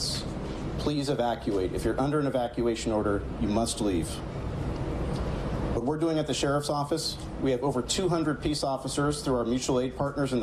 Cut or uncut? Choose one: uncut